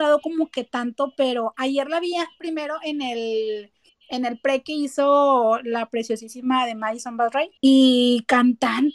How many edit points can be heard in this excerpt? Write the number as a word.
one